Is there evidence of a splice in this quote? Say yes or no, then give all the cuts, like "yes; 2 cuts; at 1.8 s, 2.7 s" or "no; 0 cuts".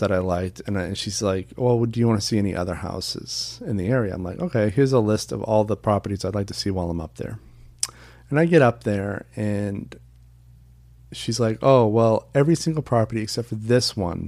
no; 0 cuts